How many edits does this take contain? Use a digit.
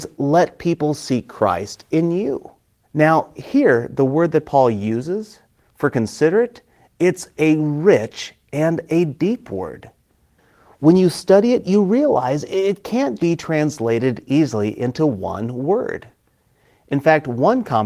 2